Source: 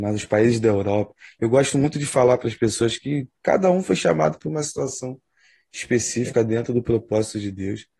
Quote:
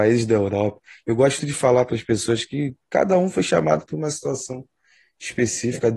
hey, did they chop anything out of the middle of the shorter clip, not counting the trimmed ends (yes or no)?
yes